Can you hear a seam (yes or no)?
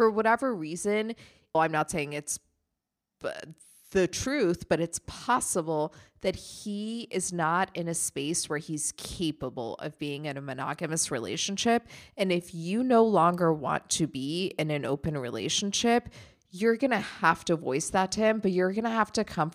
yes